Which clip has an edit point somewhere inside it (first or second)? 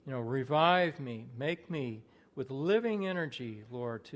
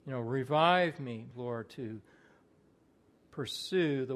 second